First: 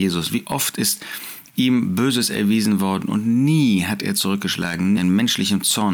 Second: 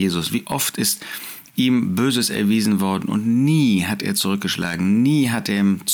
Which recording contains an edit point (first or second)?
first